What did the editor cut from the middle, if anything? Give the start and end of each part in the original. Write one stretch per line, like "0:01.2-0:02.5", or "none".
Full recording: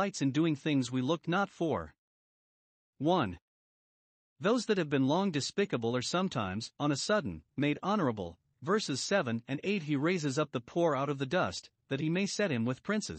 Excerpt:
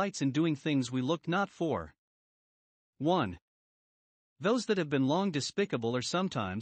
none